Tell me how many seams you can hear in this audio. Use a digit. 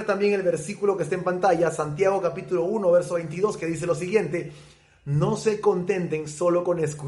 0